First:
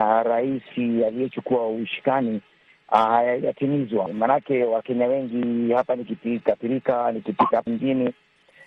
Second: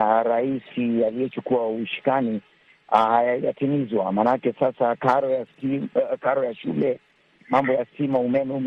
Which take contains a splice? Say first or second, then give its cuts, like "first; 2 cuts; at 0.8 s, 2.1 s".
first; 2 cuts; at 4.1 s, 7.7 s